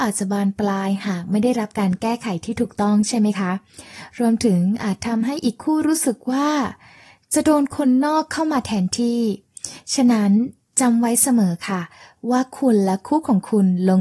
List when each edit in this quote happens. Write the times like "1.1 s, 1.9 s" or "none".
none